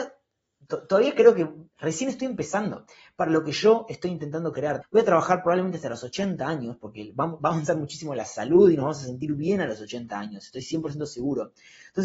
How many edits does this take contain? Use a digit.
1